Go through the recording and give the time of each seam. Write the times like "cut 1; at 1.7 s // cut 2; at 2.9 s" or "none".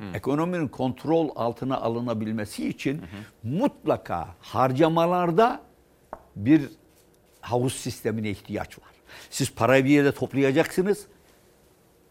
none